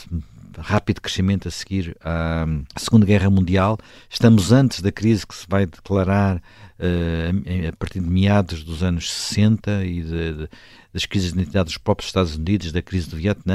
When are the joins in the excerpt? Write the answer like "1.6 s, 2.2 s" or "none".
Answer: 2.7 s

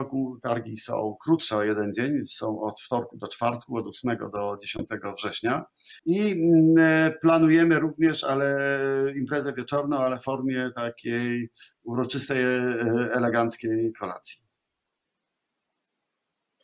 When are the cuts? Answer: 6.0 s

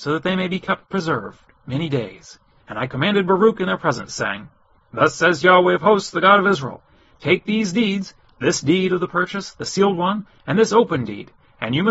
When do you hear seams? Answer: 2.6 s

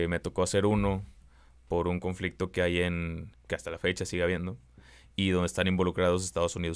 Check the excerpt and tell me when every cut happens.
3.3 s

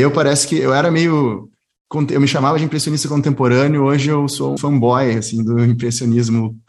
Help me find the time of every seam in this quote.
4.6 s

